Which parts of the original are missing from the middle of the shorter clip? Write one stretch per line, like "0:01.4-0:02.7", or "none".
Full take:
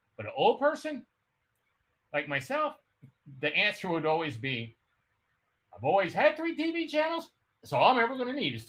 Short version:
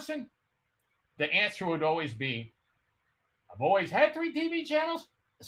0:01.9-0:03.4